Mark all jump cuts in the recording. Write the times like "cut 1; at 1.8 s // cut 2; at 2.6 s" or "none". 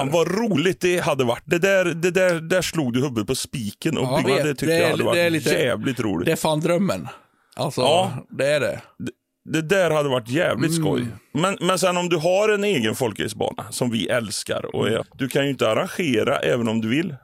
cut 1; at 4.2 s // cut 2; at 15.0 s